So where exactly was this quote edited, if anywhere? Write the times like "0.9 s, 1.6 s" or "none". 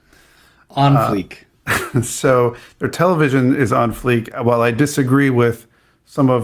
none